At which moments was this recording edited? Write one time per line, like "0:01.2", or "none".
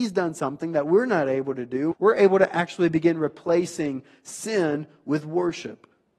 0:01.9